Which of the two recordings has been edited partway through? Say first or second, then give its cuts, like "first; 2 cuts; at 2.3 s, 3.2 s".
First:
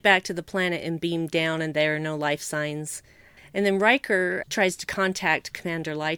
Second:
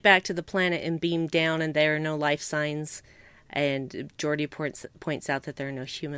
first; 2 cuts; at 3.4 s, 4.4 s